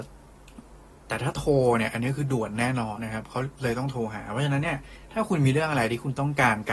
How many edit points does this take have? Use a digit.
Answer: 1